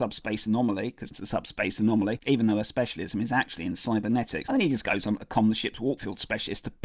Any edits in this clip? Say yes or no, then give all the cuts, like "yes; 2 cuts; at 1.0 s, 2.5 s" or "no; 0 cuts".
yes; 1 cut; at 1.1 s